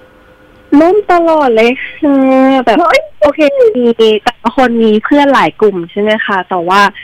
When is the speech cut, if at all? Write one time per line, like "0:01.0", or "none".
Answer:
none